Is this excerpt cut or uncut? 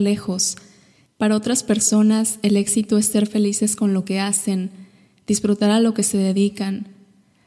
cut